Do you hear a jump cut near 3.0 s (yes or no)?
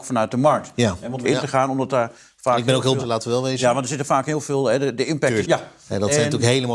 yes